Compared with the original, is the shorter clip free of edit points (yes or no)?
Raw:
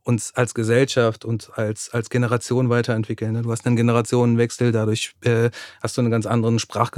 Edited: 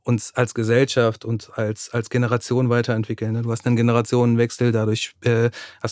yes